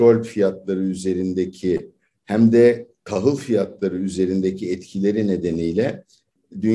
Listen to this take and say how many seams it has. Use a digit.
0